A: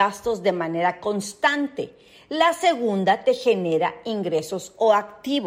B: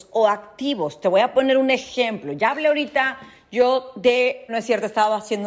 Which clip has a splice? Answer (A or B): B